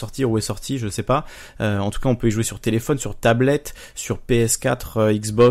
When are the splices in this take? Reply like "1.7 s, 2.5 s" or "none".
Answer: none